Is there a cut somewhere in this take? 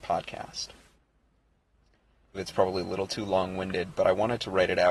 yes; 1 cut; at 2.3 s

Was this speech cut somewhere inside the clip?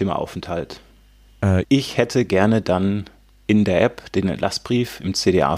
yes; 1 cut; at 1.6 s

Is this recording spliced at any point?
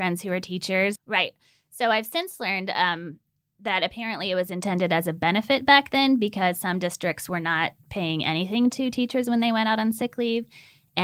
yes; 1 cut; at 1.0 s

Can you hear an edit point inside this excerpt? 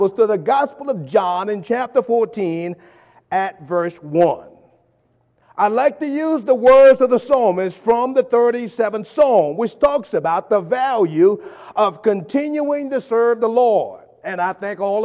yes; 1 cut; at 5.4 s

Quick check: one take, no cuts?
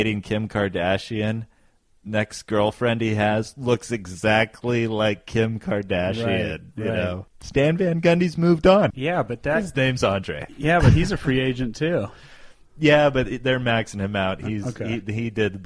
no; 1 cut; at 8.9 s

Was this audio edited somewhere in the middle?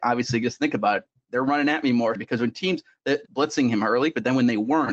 yes; 2 cuts; at 2.2 s, 3.3 s

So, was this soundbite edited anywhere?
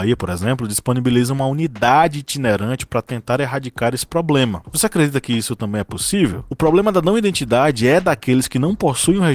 yes; 1 cut; at 4.6 s

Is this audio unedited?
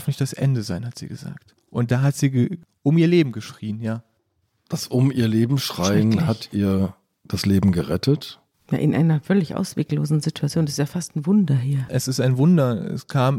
yes; 0 cuts

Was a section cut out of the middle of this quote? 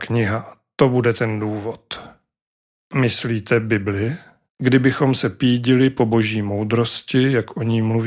yes; 1 cut; at 4.5 s

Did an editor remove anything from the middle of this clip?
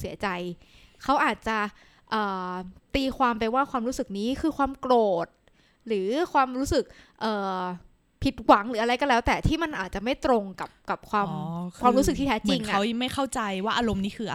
no; 0 cuts

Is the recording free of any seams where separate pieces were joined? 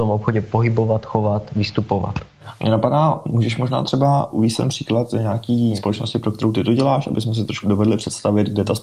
yes; 0 cuts

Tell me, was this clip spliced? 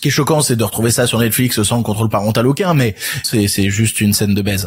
yes; 1 cut; at 3.2 s

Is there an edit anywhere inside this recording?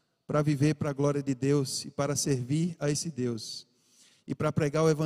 no; 0 cuts

